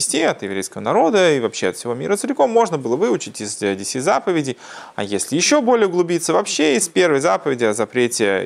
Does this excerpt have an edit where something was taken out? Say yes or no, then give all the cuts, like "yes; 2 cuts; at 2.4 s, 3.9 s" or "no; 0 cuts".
no; 0 cuts